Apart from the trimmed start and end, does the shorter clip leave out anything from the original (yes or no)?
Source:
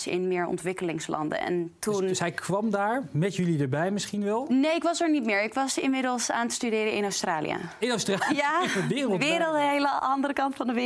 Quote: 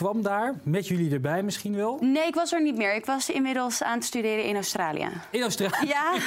no